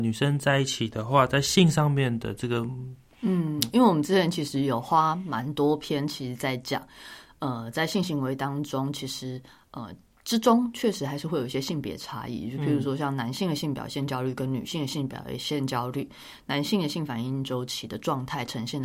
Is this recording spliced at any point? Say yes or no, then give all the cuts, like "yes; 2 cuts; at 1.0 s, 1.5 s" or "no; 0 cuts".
yes; 1 cut; at 3.1 s